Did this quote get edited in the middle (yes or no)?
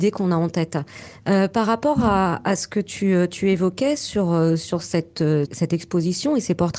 yes